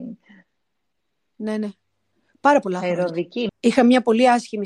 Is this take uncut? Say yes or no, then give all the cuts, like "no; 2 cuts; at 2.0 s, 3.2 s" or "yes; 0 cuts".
no; 1 cut; at 3.5 s